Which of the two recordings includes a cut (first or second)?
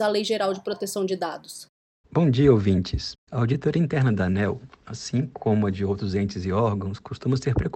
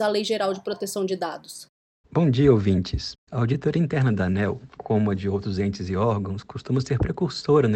second